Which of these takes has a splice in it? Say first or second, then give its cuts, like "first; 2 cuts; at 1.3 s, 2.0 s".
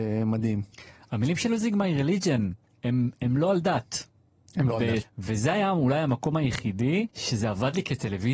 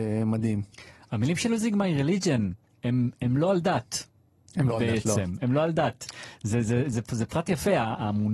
first; 2 cuts; at 5.0 s, 7.1 s